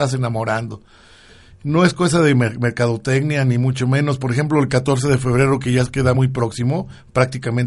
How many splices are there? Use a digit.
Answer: 0